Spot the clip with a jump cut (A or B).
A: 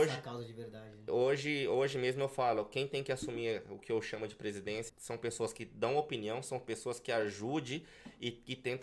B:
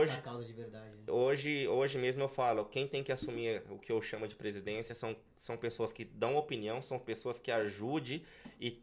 A